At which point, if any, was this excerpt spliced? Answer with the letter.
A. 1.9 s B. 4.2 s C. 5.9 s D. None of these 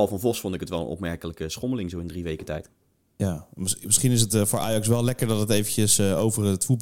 D